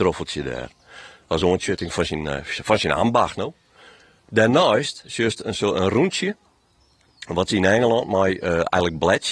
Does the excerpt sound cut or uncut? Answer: uncut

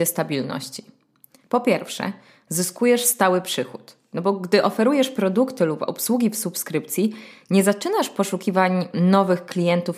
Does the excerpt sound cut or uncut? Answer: cut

